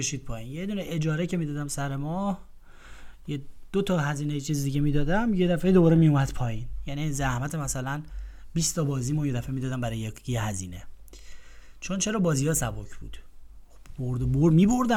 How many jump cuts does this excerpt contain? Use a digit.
0